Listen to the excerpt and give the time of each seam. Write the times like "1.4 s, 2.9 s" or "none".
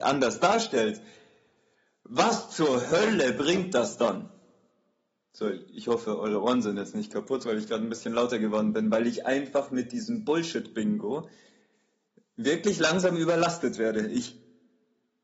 none